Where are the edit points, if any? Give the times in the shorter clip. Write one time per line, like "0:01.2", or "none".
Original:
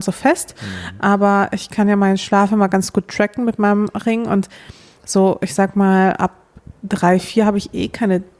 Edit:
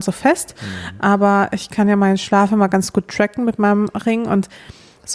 none

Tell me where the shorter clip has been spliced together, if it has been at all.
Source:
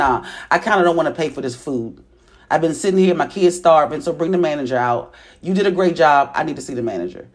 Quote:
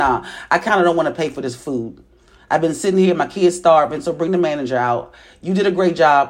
none

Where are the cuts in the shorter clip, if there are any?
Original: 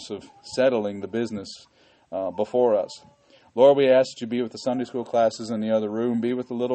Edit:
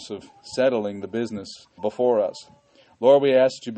0:01.8

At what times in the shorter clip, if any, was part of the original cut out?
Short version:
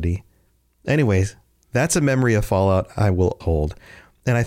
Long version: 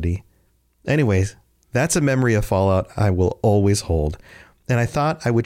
0:03.4

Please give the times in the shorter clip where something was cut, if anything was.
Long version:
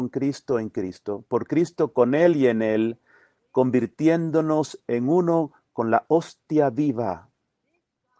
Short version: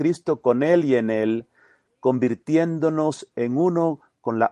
none

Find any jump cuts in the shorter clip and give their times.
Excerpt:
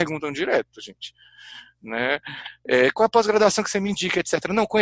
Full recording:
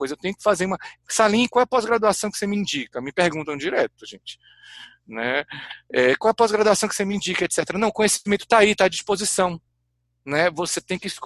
none

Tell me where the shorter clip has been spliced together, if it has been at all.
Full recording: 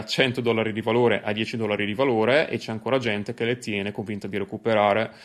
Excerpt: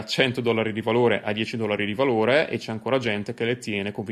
none

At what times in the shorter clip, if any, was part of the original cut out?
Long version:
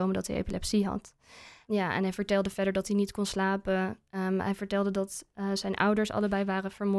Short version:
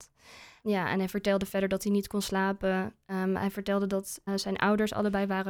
0:04.3

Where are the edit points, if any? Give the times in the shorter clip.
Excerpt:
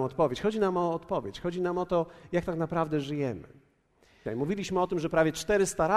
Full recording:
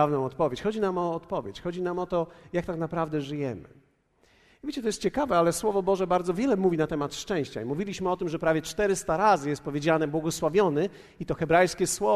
0:04.3

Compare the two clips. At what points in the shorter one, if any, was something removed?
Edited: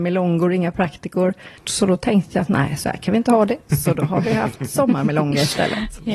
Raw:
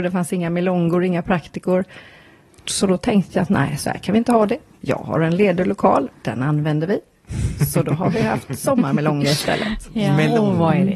0:01.6
0:03.7

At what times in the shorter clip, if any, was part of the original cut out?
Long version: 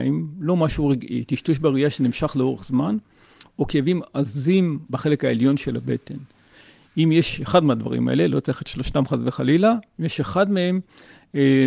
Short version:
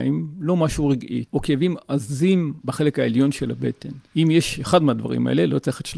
0:01.2
0:04.1

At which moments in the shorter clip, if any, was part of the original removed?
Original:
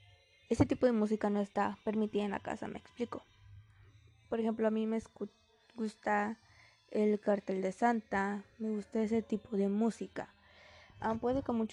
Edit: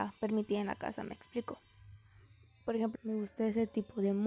0:02.9

